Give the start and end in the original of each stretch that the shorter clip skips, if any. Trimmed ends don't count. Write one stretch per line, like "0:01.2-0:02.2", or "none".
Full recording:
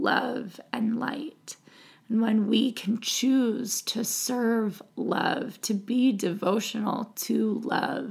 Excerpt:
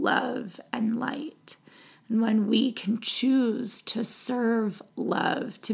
none